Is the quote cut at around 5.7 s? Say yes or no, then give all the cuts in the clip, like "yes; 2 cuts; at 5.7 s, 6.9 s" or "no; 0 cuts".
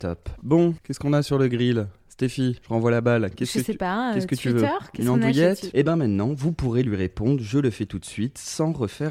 yes; 1 cut; at 5.7 s